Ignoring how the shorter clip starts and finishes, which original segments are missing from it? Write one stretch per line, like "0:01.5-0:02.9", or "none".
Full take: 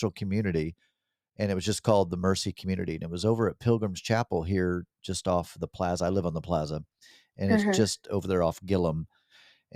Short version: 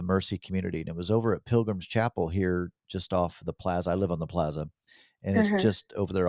none